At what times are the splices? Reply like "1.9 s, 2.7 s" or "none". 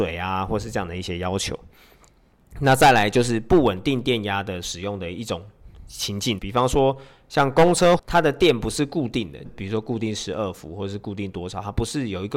6.4 s, 8.0 s, 9.5 s